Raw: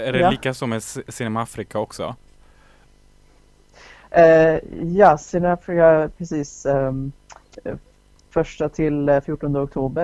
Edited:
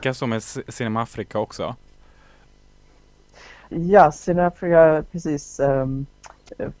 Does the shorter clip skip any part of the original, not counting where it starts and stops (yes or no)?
yes